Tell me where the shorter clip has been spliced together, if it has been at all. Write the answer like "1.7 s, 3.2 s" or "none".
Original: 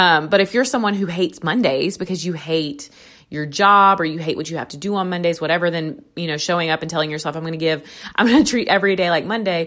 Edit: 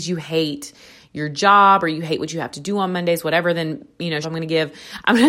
4.2 s